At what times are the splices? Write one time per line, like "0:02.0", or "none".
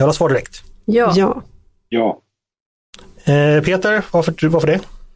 none